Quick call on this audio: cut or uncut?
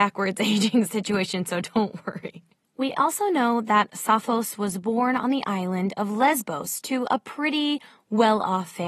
uncut